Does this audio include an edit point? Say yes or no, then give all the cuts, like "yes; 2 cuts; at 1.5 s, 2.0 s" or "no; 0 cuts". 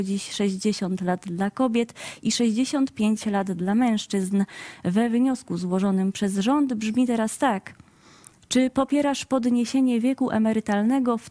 no; 0 cuts